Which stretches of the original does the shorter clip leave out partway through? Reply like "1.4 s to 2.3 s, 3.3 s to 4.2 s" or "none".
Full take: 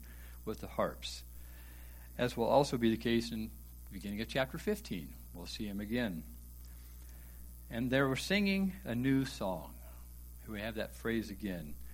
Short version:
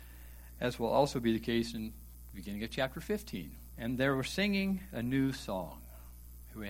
5.3 s to 7.7 s